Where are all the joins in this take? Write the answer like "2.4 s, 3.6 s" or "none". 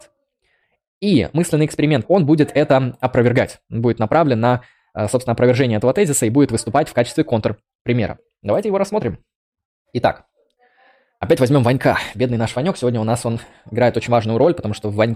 2.0 s

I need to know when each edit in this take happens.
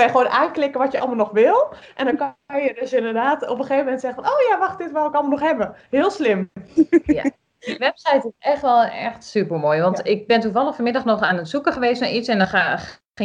none

